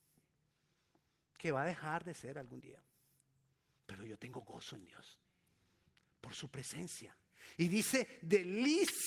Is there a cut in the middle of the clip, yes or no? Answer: no